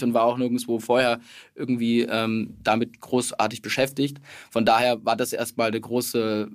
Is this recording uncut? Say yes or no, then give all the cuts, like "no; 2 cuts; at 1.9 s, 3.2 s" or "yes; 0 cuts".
yes; 0 cuts